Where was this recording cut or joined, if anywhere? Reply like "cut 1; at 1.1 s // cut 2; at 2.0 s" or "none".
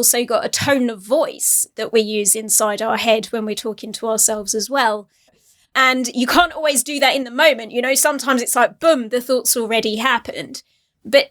cut 1; at 5.3 s